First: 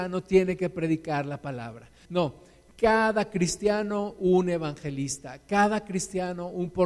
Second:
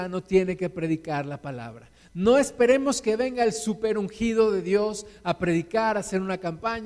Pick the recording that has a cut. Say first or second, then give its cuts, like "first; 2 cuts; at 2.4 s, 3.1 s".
first; 1 cut; at 2.1 s